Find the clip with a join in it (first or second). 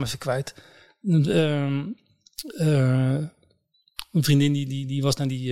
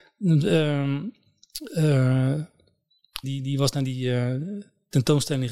second